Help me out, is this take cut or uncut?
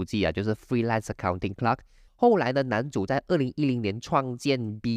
cut